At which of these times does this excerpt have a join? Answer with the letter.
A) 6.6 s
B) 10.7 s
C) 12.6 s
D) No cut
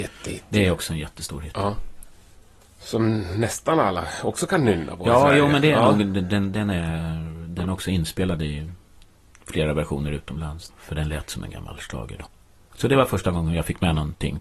B